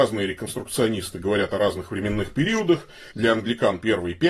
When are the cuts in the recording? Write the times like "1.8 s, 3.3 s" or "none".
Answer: 3.1 s